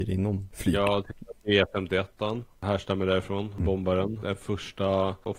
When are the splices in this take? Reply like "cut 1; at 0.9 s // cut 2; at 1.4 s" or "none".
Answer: none